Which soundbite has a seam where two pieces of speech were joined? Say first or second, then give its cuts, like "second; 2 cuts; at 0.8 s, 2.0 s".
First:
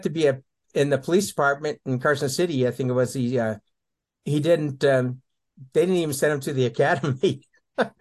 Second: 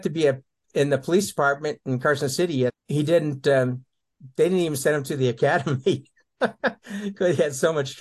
second; 1 cut; at 2.7 s